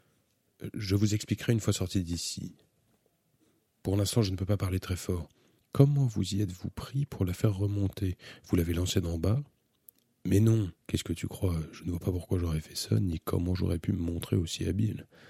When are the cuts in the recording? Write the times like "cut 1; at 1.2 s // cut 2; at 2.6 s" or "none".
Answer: cut 1; at 5.6 s // cut 2; at 10.8 s